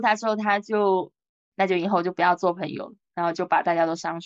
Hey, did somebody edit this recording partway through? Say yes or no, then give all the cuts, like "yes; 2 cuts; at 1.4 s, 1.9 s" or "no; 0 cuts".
no; 0 cuts